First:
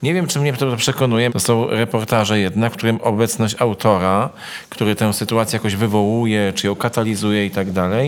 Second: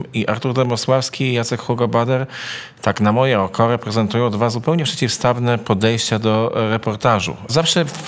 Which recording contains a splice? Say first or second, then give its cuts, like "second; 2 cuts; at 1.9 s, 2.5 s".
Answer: first; 1 cut; at 1.3 s